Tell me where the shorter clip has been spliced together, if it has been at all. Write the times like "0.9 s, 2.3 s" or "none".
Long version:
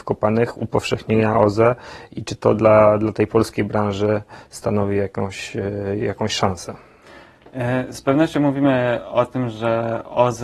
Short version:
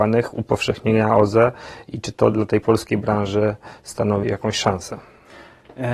2.3 s, 4.2 s